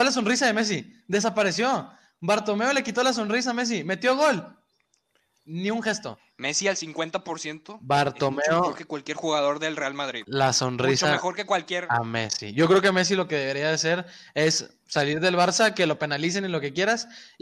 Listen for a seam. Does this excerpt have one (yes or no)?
yes